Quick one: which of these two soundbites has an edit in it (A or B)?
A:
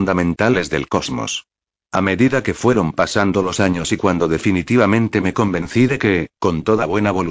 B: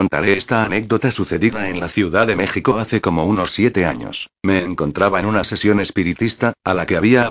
B